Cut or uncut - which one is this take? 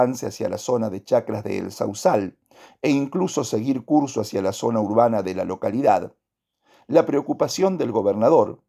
uncut